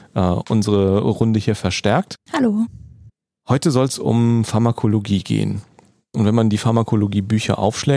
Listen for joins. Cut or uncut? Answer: uncut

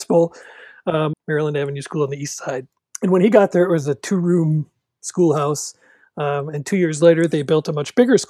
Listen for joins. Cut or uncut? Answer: cut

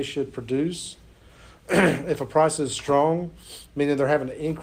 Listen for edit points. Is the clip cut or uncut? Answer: uncut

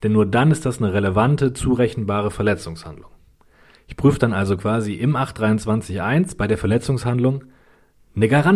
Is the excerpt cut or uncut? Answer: uncut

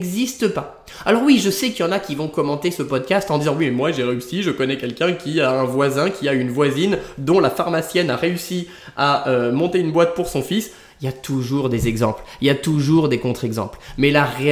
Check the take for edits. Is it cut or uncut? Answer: uncut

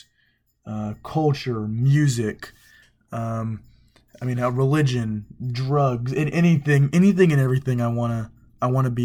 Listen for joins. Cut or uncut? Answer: uncut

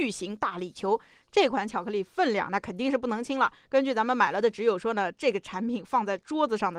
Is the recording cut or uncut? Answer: uncut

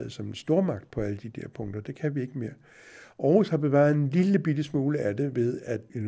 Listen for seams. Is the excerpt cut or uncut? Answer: uncut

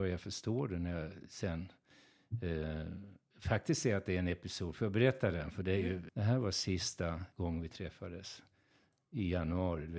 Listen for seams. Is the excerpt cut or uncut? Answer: cut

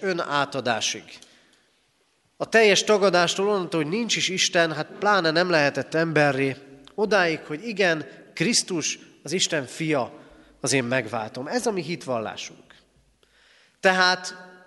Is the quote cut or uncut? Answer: uncut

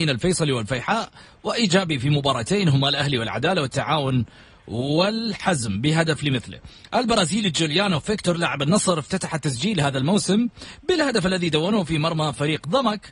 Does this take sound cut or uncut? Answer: uncut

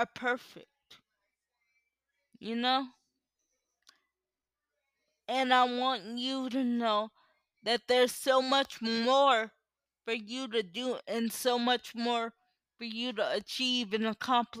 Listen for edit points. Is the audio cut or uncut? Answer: uncut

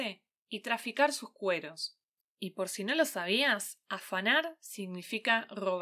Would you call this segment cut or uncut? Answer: cut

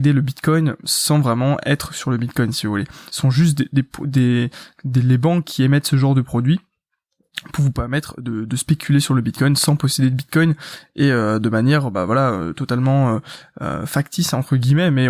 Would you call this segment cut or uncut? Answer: uncut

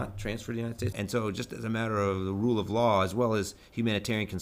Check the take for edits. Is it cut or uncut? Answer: cut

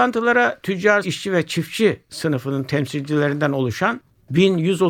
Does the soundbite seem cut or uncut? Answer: cut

